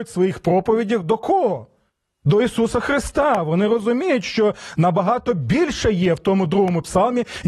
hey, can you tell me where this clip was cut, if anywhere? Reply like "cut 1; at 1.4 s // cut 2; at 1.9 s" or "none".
none